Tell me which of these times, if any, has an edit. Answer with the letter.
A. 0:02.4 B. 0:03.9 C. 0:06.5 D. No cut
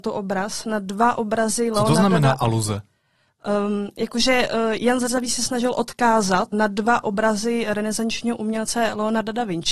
C